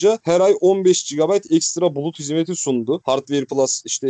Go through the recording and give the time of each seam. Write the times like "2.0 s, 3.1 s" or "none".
3.0 s